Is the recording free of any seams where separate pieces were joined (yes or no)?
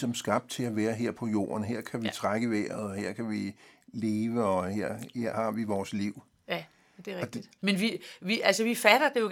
no